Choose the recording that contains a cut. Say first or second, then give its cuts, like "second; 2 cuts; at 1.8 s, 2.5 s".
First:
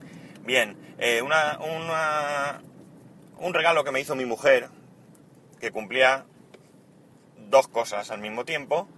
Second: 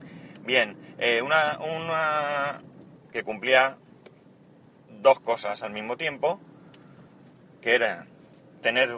second; 1 cut; at 3.0 s